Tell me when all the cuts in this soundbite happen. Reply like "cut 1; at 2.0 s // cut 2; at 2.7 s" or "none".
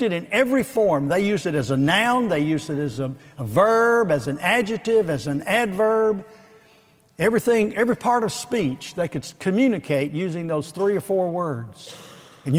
none